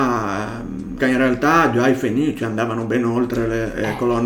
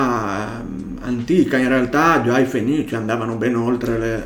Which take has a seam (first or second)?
first